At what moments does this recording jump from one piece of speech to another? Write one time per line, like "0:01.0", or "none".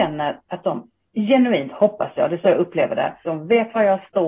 0:03.2